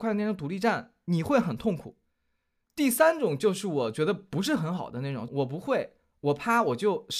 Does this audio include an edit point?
yes; 2 cuts; at 2.6 s, 5.3 s

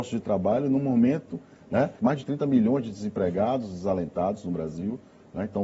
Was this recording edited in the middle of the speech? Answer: yes; 1 cut; at 2.0 s

